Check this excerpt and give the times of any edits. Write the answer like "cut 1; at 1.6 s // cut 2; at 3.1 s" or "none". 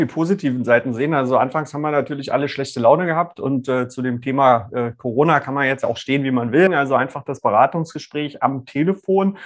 cut 1; at 6.7 s